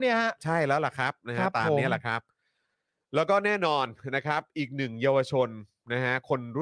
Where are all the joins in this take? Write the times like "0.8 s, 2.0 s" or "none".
none